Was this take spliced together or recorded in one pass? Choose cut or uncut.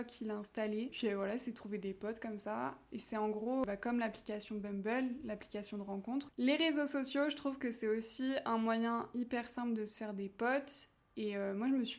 cut